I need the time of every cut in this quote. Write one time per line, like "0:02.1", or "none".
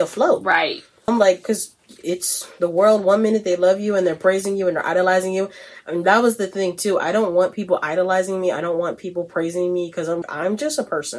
0:01.1
0:10.2